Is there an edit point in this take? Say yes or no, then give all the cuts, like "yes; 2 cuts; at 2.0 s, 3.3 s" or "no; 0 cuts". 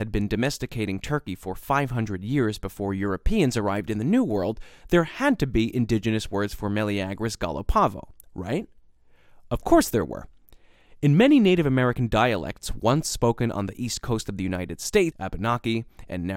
yes; 2 cuts; at 4.8 s, 15.1 s